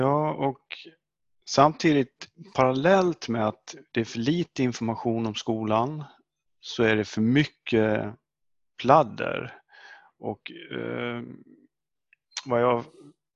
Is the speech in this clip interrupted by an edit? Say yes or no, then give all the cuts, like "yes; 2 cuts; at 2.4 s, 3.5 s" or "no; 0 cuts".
no; 0 cuts